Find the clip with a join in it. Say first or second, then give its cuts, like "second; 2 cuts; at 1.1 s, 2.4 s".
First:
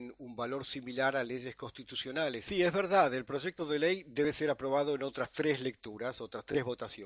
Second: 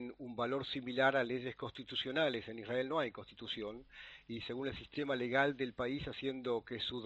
first; 1 cut; at 2.5 s